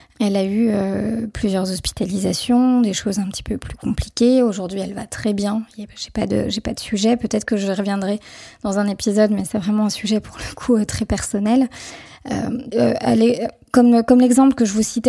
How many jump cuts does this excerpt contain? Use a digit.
1